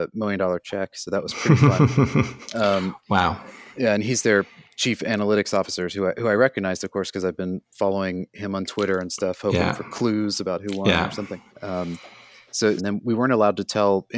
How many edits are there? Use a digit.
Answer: 2